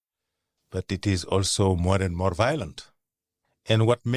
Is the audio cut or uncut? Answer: uncut